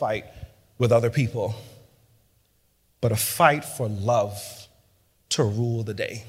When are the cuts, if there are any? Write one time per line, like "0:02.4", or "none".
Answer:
none

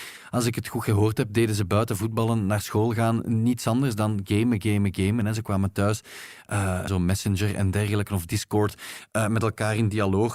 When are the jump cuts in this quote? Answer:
0:06.9

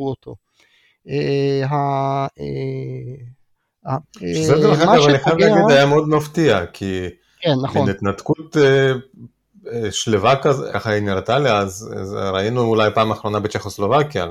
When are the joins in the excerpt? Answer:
0:04.0
0:10.7

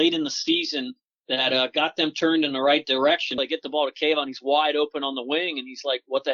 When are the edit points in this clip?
0:03.4

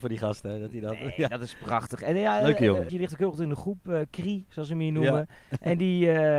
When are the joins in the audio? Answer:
0:02.9

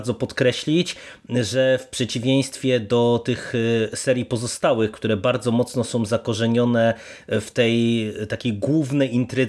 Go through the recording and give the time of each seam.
none

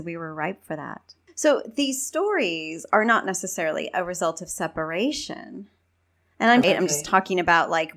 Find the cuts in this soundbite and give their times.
0:06.6

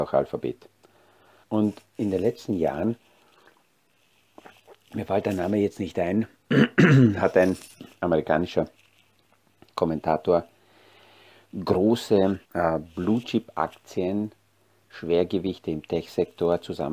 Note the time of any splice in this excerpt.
0:01.4
0:07.9
0:12.4

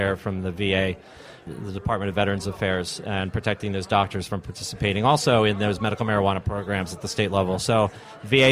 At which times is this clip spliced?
none

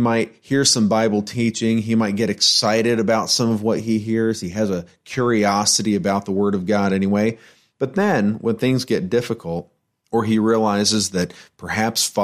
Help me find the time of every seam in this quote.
none

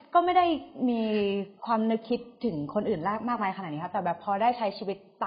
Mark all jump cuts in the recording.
0:01.6

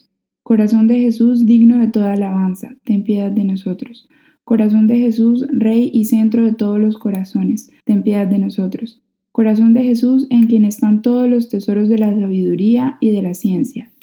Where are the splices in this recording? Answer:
0:07.8

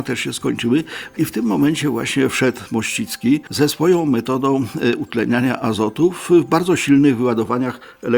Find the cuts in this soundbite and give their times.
0:01.1

